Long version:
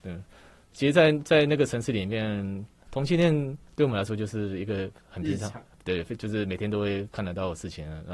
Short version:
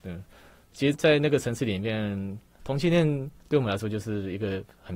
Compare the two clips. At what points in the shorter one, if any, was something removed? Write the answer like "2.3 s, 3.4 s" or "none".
0.9 s